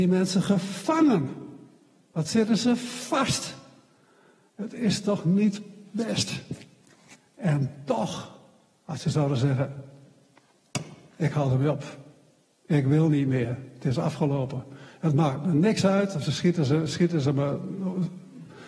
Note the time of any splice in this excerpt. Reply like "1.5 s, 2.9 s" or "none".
none